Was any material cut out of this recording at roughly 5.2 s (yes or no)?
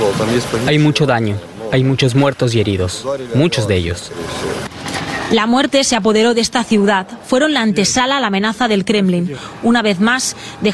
no